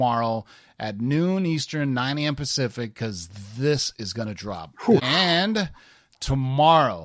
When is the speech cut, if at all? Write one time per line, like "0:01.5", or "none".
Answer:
0:05.0